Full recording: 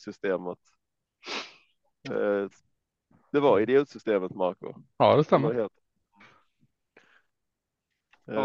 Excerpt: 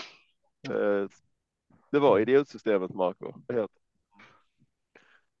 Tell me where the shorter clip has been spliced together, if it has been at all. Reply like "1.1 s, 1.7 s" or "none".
3.5 s